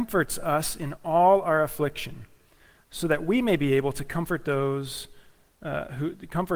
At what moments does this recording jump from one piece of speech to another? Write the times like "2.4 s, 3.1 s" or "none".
none